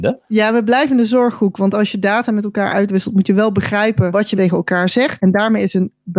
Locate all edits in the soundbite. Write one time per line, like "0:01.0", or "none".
0:05.2